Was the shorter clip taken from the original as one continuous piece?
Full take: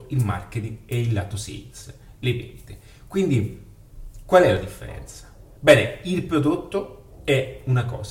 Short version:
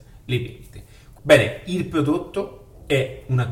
no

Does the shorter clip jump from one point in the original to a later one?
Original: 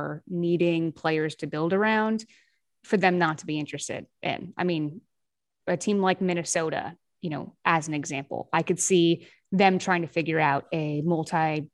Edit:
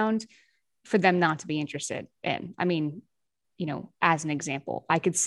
yes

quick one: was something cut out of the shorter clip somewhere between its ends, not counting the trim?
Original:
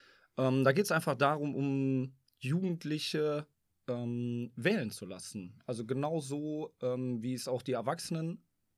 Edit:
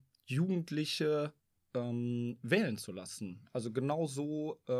no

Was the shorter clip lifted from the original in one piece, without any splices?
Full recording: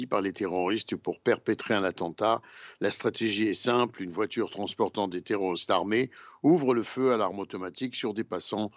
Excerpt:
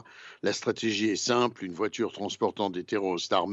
yes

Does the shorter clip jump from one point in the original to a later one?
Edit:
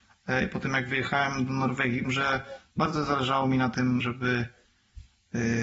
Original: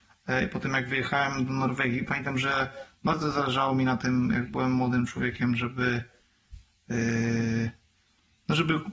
yes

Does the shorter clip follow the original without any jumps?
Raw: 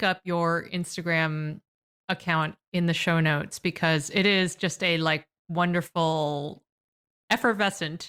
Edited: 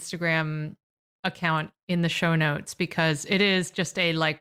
yes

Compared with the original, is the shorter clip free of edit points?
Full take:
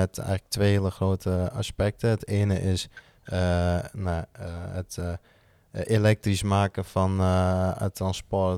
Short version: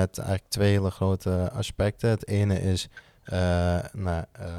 yes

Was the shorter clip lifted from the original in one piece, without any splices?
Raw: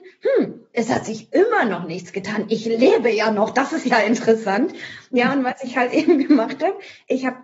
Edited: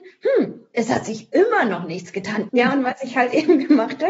no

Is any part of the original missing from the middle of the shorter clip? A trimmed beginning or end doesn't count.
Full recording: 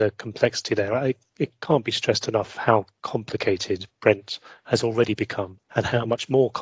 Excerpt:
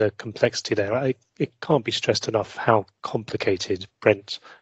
no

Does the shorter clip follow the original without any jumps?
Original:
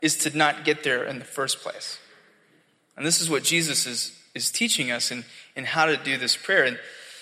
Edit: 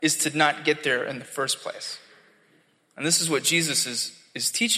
yes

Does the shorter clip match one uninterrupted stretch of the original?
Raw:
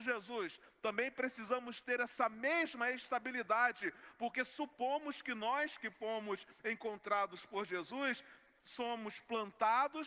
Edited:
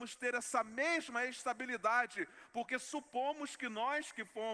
yes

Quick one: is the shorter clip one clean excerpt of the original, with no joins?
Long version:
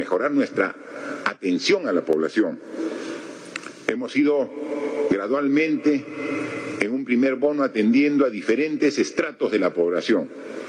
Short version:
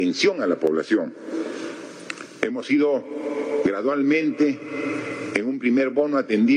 yes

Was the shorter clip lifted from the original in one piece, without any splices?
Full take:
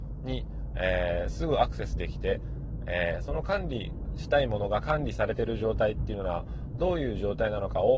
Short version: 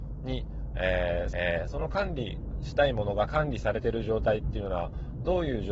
no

